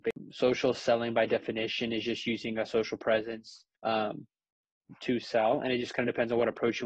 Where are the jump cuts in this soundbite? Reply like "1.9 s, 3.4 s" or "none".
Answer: 3.7 s